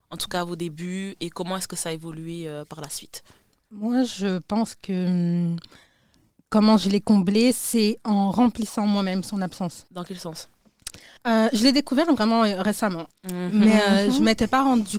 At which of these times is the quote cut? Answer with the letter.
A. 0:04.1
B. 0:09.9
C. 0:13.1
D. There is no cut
C